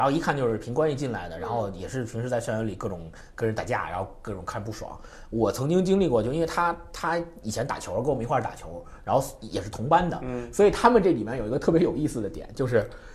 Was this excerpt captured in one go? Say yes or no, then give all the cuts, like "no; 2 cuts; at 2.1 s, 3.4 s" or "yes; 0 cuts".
yes; 0 cuts